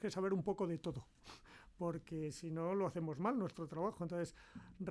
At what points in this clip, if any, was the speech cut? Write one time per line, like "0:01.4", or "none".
none